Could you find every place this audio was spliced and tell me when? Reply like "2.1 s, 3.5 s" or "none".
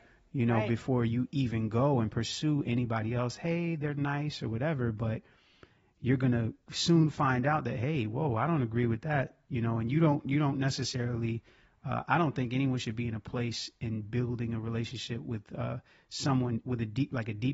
none